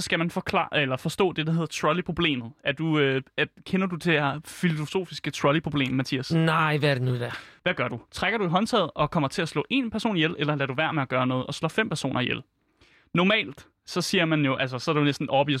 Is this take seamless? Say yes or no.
no